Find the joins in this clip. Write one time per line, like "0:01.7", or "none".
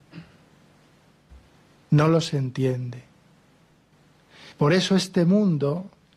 0:04.5